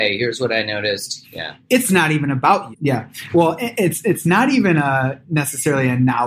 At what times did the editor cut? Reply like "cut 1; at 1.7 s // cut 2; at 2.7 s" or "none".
cut 1; at 1.2 s // cut 2; at 2.7 s